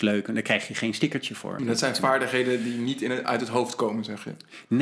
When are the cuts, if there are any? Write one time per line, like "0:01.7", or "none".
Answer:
0:01.6